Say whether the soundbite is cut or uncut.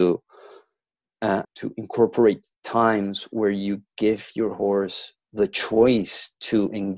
cut